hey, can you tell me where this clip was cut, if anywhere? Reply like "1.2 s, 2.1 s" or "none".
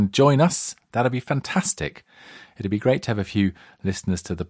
none